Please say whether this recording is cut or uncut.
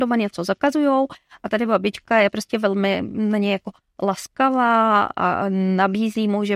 uncut